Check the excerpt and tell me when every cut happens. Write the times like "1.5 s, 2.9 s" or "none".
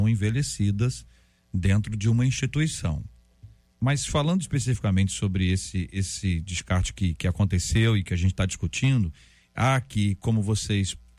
3.7 s